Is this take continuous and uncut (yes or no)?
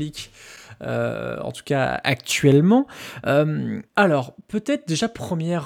no